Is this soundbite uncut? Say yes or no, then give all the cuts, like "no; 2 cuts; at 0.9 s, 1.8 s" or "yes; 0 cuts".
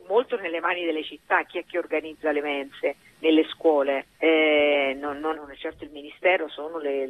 no; 2 cuts; at 4.1 s, 5.3 s